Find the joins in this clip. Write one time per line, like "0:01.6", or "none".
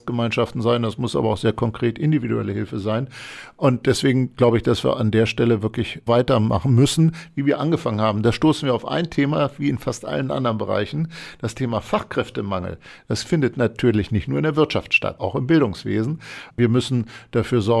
0:06.1
0:15.2
0:16.5